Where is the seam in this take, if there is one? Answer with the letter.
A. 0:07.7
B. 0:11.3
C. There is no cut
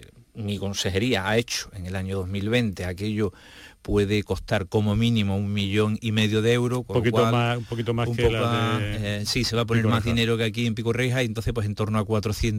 C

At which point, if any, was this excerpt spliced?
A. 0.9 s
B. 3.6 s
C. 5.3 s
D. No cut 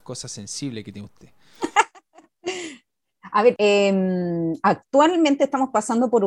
B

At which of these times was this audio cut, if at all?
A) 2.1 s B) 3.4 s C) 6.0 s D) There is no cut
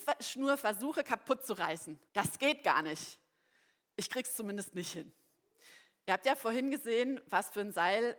A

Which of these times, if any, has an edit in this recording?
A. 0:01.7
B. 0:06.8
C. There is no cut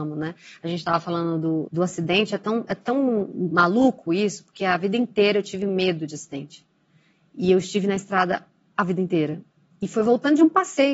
A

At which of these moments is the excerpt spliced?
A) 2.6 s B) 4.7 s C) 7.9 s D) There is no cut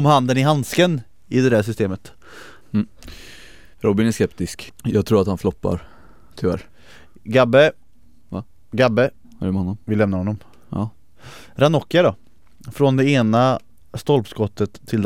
B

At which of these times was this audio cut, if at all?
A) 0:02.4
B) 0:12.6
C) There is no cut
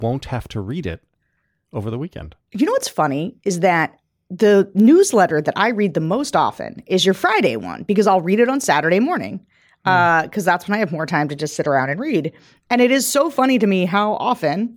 C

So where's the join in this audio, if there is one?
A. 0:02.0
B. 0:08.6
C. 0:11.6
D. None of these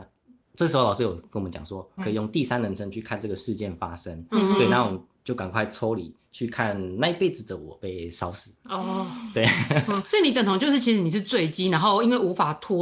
A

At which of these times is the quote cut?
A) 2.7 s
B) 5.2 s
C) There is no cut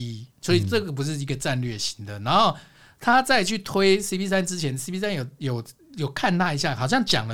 C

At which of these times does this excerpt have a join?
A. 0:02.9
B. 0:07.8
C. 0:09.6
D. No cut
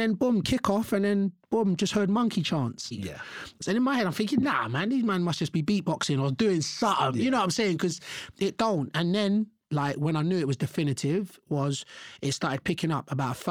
A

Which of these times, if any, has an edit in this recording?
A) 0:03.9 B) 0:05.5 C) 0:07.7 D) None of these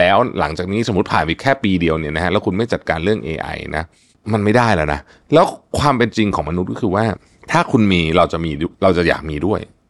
D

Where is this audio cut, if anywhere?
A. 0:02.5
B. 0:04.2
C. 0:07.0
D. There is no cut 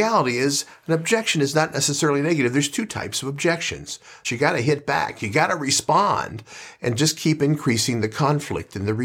B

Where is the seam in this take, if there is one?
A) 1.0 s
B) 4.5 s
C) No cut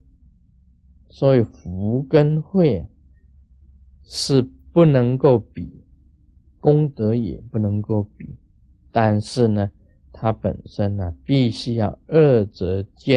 C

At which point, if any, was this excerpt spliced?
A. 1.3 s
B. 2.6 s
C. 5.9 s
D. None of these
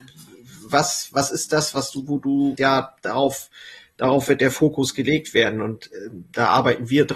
B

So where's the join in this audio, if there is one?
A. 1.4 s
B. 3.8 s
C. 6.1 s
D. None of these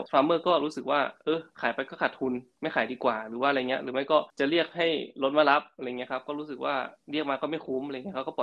D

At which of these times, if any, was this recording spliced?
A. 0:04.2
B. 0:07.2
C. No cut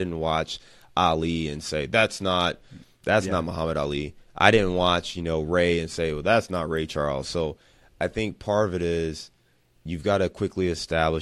C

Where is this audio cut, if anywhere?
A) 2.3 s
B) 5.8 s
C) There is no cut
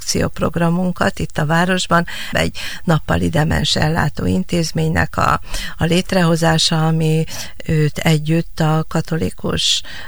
A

